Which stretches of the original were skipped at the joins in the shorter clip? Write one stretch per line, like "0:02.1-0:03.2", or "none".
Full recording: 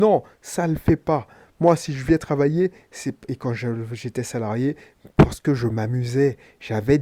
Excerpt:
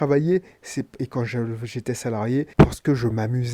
0:04.8-0:05.1